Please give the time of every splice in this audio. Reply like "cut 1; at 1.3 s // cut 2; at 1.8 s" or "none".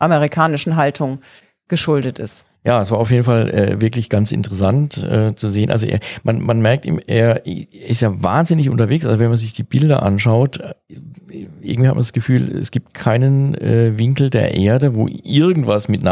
cut 1; at 2.6 s